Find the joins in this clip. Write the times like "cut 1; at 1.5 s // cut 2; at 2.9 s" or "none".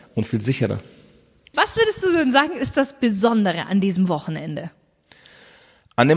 cut 1; at 1.5 s

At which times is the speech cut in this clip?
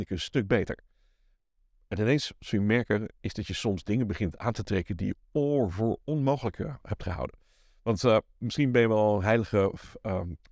none

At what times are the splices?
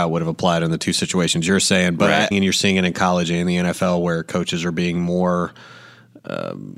cut 1; at 2.3 s

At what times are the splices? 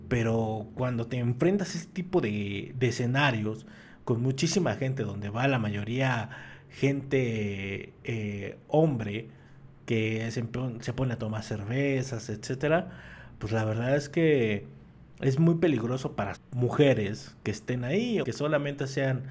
cut 1; at 16.4 s // cut 2; at 18.2 s

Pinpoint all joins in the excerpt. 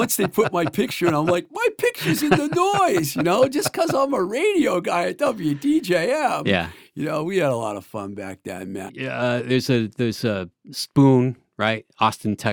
cut 1; at 8.9 s // cut 2; at 10.7 s

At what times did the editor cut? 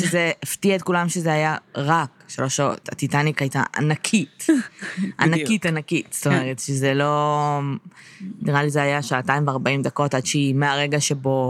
none

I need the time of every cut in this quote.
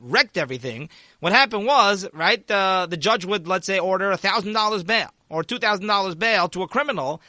none

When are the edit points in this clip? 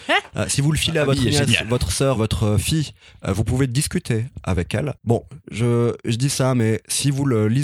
cut 1; at 2.1 s // cut 2; at 5.0 s

